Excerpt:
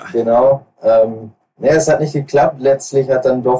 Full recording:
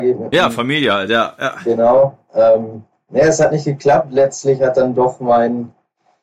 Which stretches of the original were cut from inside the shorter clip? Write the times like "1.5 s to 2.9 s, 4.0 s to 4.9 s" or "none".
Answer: none